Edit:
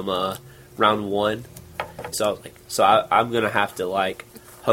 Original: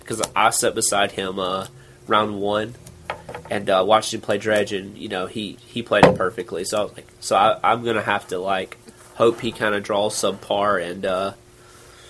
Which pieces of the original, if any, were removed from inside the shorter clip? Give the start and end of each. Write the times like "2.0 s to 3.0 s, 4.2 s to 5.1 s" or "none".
3.4 s to 6.6 s